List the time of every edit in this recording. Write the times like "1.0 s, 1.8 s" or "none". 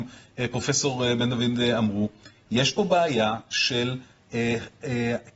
none